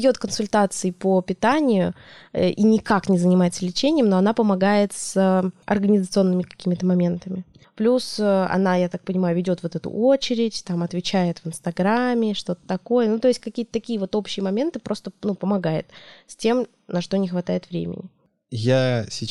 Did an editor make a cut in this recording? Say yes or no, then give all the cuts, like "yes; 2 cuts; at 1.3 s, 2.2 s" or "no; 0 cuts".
no; 0 cuts